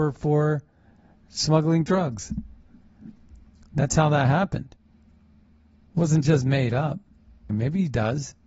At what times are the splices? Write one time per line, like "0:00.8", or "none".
0:07.5